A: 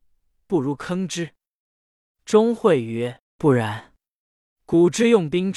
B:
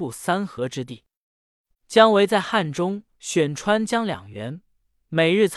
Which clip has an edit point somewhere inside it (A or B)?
B